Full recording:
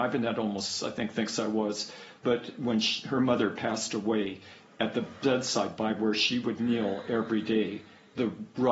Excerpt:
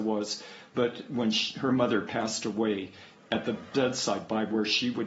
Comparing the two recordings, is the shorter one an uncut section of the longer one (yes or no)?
yes